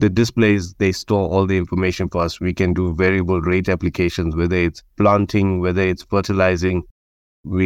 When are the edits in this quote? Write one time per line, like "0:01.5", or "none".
none

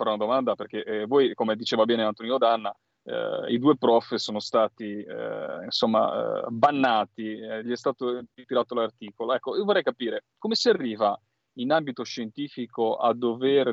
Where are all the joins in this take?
none

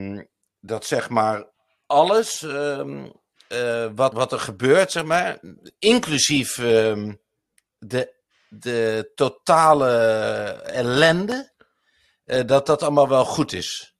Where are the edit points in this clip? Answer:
0:04.1

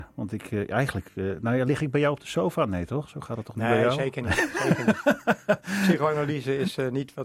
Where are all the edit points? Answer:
none

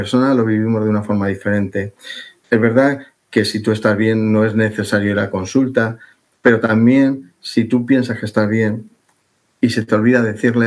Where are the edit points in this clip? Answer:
0:02.4

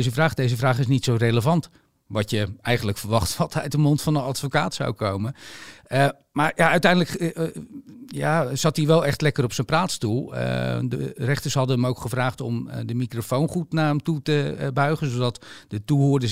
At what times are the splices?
none

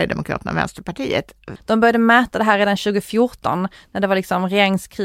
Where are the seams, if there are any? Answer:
0:01.6

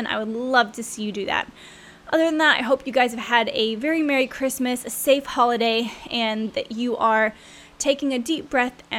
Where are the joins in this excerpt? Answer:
none

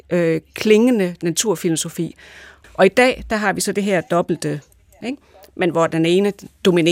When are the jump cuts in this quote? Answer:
0:02.6
0:05.0

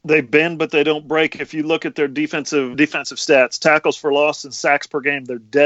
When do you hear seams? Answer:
0:02.7

